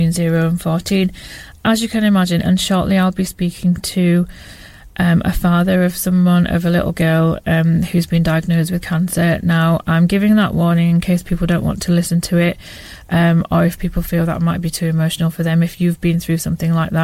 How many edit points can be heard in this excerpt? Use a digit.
1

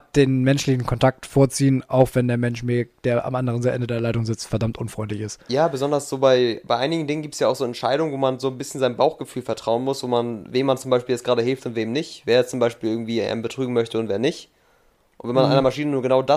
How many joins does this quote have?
0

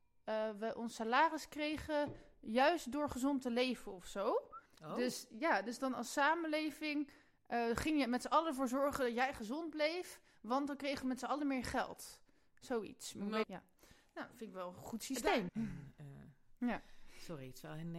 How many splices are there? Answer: 3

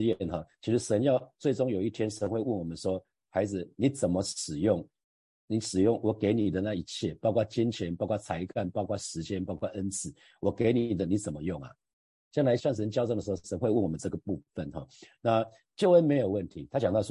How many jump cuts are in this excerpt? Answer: 1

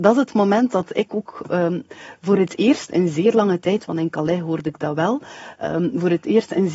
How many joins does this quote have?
0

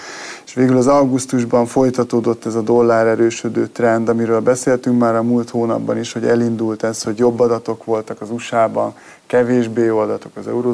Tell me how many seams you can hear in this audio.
0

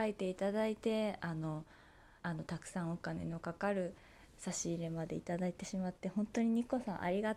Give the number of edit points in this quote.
1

